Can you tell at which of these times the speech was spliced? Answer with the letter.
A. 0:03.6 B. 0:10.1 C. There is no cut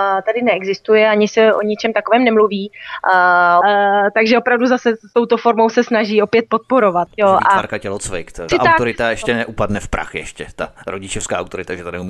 A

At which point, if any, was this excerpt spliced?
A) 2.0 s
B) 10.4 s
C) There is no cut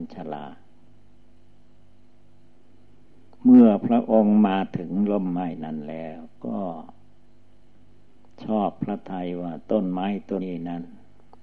B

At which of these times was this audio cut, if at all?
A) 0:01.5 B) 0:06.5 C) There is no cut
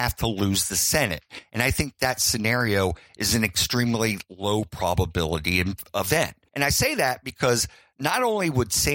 B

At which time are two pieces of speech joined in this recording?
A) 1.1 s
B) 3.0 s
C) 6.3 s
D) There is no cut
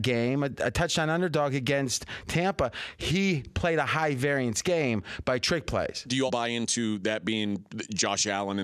C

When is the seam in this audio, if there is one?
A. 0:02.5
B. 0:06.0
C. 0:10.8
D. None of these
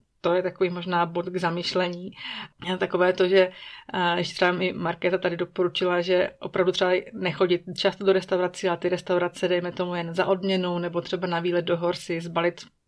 A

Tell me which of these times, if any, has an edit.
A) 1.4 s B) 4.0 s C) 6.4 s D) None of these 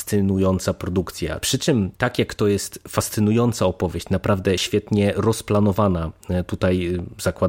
A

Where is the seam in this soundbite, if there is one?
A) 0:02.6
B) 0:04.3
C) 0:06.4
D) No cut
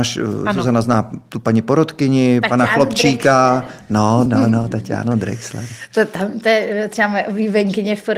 B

